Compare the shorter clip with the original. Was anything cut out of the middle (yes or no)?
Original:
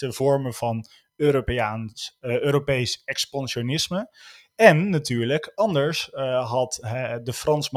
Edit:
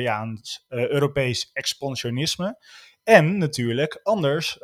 no